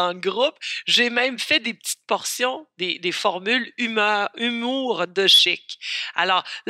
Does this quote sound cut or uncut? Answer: uncut